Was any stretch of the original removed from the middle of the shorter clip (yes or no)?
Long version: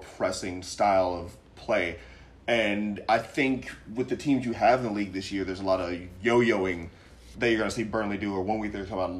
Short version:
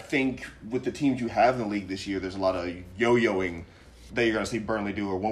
no